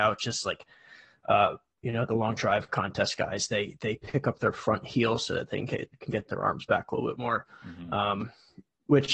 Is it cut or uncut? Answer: uncut